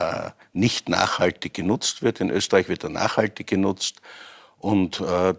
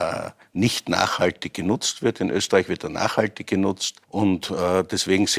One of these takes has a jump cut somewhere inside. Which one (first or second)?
second